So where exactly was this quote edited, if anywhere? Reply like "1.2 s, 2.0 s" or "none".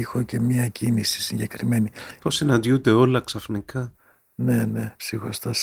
2.2 s

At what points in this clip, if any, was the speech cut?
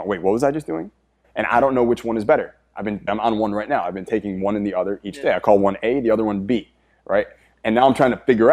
1.2 s, 3.1 s

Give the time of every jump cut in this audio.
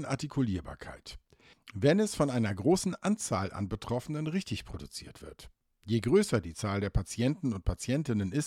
1.5 s

